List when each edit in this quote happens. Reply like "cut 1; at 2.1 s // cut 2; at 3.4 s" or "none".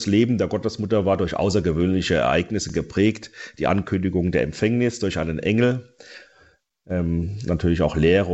none